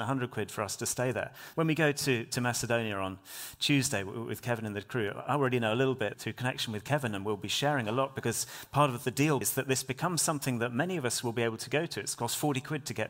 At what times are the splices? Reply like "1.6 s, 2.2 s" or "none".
1.5 s, 6.1 s, 9.4 s